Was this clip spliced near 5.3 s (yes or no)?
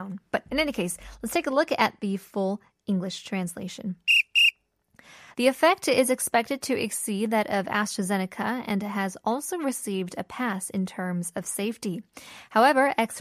yes